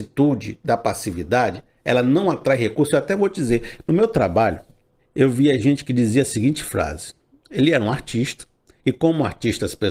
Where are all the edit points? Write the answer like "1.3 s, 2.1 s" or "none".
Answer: 5.0 s